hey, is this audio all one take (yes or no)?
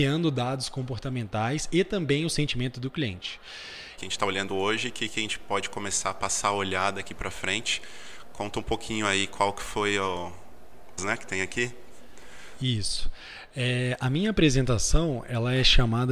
no